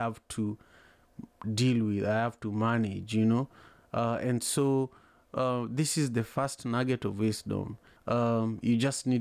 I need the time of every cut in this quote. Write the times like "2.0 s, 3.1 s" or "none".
8.0 s

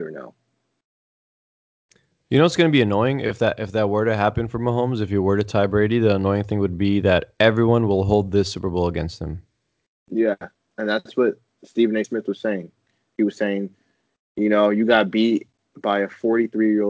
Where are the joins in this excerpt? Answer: none

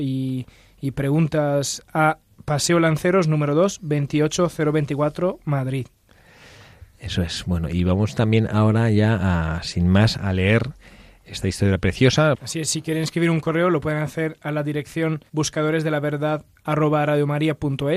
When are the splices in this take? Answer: 12.3 s, 15.3 s

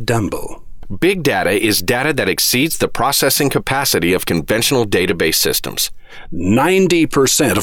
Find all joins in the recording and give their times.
6.3 s

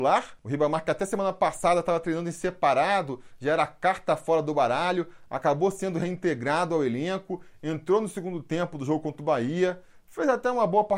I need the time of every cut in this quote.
none

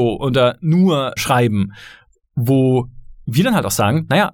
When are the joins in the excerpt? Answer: 1.2 s

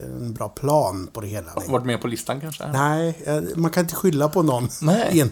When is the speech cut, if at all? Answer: 1.6 s

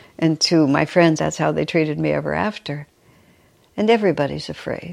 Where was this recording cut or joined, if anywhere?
1.2 s

